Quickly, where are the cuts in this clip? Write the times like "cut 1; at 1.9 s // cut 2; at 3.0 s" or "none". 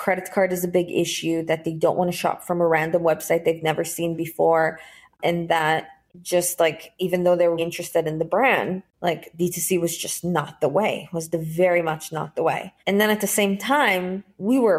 cut 1; at 7.6 s // cut 2; at 12.8 s